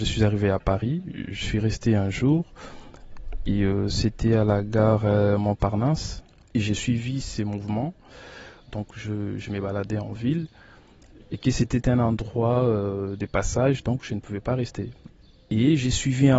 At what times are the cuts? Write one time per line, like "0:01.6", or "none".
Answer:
0:06.5
0:08.6
0:11.2